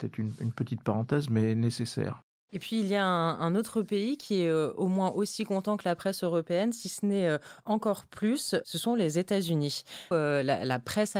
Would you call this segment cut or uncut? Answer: cut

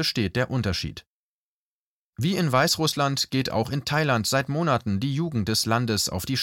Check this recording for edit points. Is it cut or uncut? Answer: uncut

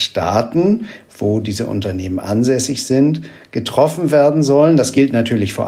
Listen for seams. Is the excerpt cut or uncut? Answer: uncut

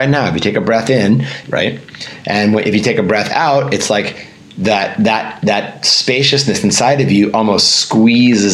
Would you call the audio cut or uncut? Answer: cut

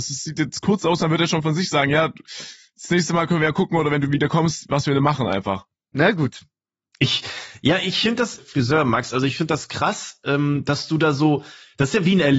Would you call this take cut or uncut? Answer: cut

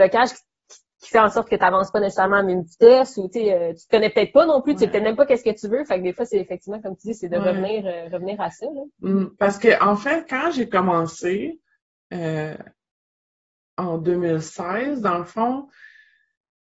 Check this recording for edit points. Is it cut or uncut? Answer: uncut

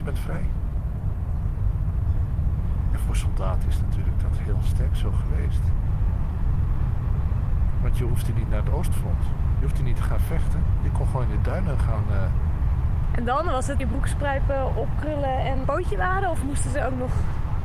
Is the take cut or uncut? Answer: cut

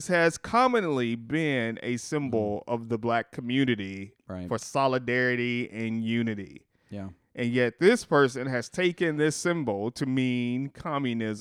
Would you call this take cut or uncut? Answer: uncut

